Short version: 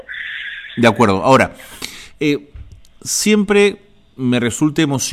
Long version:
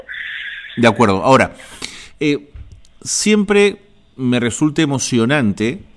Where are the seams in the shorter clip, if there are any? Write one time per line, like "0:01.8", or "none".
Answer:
none